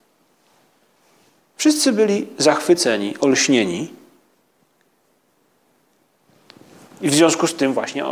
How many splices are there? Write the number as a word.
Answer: zero